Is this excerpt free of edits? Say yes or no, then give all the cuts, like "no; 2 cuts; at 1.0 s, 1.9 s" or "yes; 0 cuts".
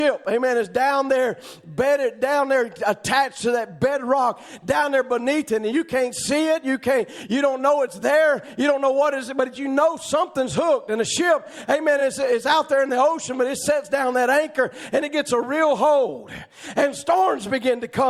yes; 0 cuts